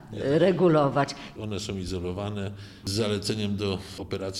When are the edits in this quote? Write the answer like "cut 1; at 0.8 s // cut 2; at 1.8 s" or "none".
cut 1; at 1.4 s // cut 2; at 2.8 s